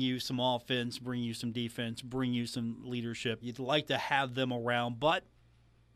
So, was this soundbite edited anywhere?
yes; 1 cut; at 3.4 s

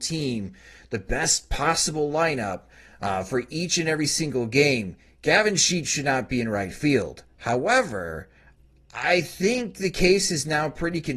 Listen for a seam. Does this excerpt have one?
no; 0 cuts

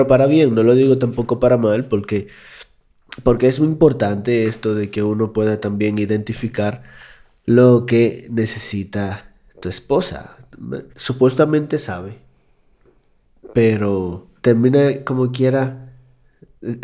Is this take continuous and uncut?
no; 2 cuts; at 10.9 s, 14.4 s

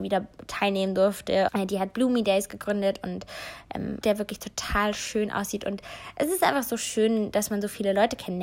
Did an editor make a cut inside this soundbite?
yes; 2 cuts; at 1.5 s, 4.0 s

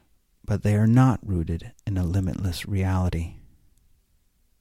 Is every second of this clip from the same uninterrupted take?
yes; 0 cuts

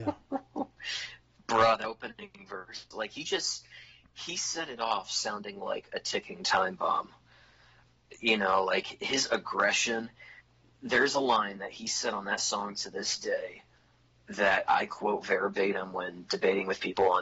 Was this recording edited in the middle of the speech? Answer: no; 0 cuts

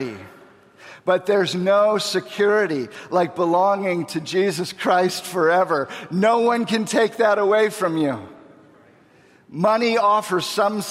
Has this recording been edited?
no; 0 cuts

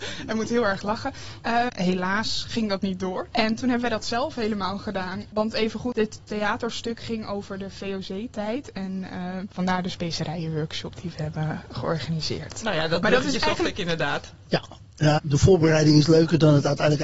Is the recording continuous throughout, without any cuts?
no; 2 cuts; at 1.7 s, 15.2 s

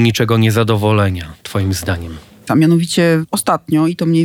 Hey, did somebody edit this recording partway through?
yes; 1 cut; at 2.5 s

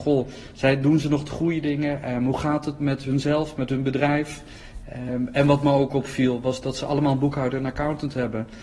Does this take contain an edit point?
no; 0 cuts

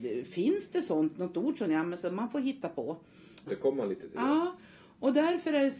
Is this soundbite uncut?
no; 1 cut; at 3.5 s

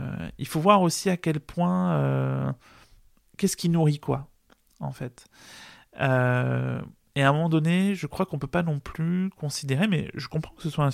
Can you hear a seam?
no; 0 cuts

